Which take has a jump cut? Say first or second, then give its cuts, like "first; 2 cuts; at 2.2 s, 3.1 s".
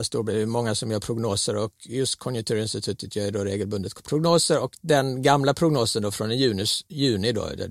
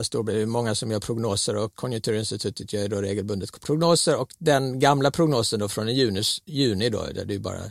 second; 1 cut; at 1.7 s